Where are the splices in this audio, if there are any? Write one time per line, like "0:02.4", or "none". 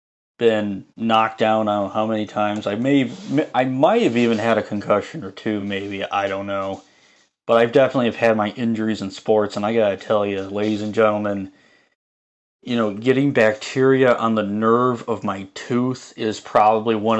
none